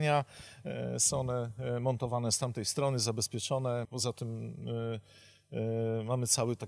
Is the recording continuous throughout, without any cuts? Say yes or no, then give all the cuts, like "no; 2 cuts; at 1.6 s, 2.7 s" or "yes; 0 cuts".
no; 1 cut; at 3.8 s